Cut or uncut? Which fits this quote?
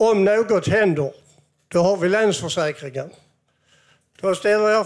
uncut